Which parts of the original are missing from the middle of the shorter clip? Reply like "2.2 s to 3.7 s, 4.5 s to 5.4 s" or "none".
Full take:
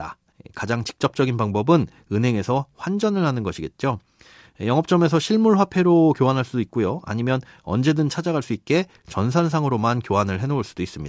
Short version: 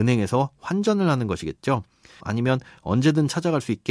4.4 s to 7.0 s